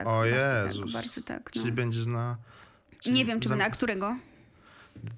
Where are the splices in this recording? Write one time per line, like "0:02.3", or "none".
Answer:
none